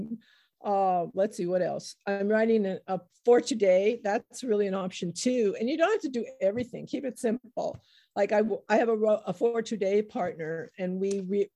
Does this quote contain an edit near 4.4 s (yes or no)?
no